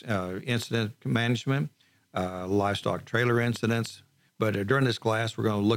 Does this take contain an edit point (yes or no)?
yes